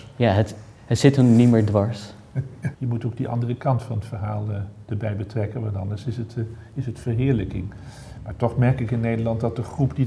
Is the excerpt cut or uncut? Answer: cut